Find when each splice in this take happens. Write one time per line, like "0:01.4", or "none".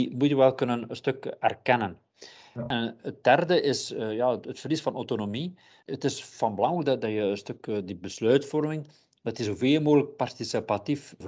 none